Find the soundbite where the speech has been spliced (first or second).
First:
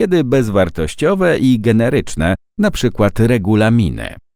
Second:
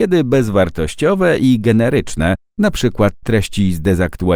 second